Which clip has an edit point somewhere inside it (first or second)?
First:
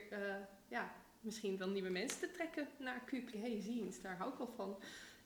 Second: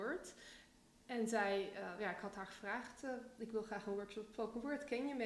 first